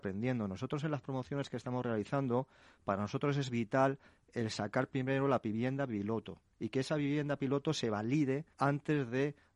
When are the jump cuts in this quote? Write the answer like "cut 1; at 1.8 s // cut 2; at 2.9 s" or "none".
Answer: cut 1; at 8.5 s